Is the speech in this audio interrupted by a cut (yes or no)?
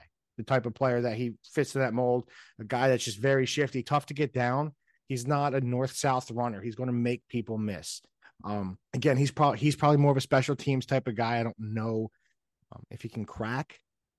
yes